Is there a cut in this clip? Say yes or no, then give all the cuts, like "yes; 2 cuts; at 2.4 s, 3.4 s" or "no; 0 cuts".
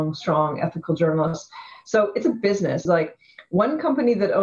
yes; 1 cut; at 2.9 s